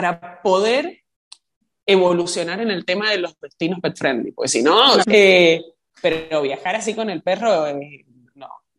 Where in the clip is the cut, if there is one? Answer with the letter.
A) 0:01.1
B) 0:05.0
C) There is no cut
B